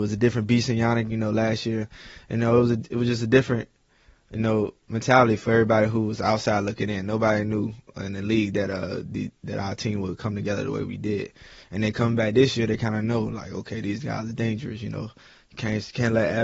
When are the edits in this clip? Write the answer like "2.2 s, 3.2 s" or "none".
1.8 s